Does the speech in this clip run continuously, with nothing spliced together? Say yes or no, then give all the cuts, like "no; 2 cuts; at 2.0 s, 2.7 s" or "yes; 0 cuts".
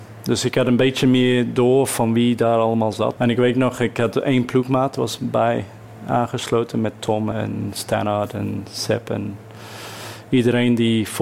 no; 2 cuts; at 3.2 s, 7.3 s